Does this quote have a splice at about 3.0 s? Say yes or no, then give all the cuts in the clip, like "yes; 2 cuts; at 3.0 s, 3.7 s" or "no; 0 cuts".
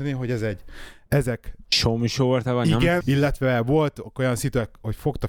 yes; 1 cut; at 3.0 s